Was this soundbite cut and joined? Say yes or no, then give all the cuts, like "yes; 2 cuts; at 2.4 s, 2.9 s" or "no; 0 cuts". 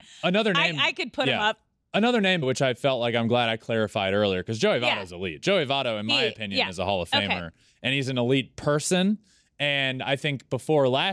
yes; 1 cut; at 2.4 s